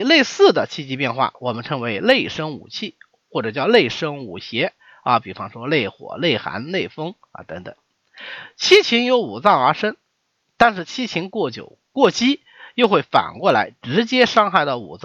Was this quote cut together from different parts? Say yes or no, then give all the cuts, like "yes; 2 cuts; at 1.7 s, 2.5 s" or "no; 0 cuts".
no; 0 cuts